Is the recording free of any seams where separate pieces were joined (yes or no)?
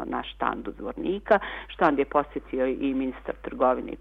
yes